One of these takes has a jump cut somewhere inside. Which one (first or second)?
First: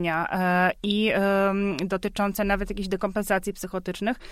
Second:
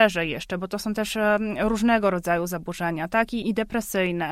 second